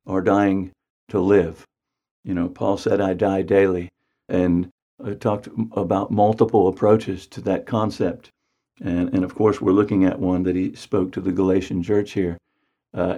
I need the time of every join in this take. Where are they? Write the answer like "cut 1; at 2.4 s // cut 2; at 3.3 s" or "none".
none